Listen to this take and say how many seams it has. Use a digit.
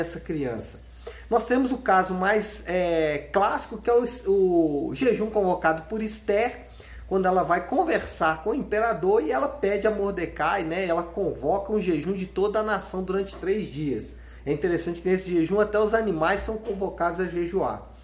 0